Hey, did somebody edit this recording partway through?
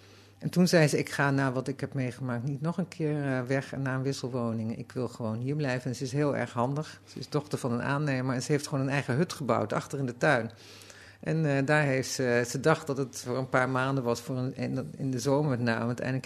no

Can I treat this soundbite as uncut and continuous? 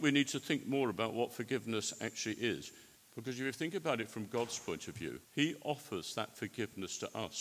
no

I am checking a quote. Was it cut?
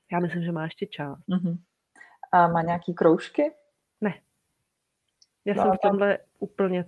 yes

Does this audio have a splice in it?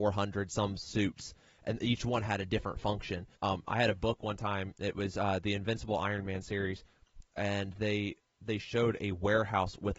yes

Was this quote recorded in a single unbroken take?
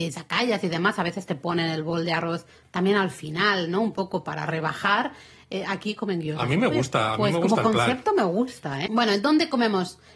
no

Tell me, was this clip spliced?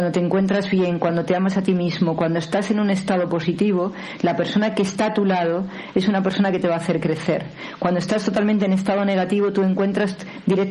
no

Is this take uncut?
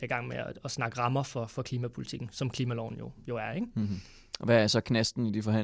yes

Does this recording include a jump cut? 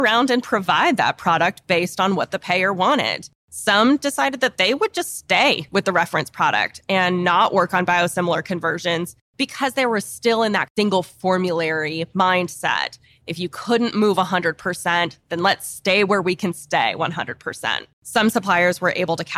yes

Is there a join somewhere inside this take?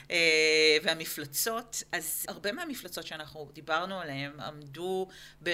yes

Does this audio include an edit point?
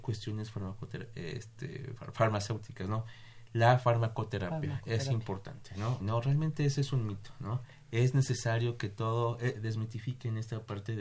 yes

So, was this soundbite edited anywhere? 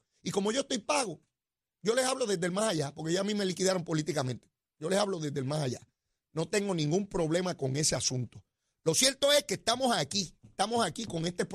no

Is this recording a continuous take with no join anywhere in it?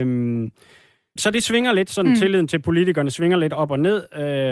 no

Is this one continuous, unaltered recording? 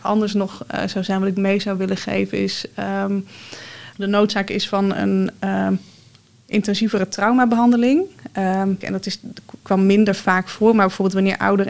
no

